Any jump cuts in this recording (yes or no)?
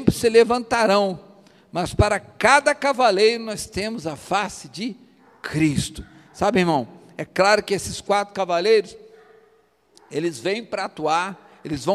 no